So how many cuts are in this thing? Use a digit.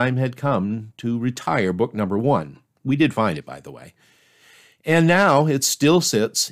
0